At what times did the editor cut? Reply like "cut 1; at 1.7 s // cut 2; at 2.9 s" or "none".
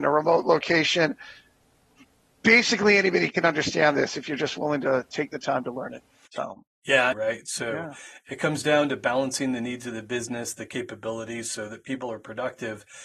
cut 1; at 7.1 s